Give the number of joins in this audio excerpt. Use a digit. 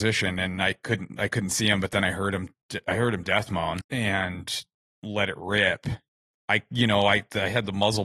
2